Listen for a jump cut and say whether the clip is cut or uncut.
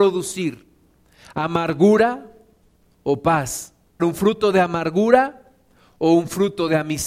cut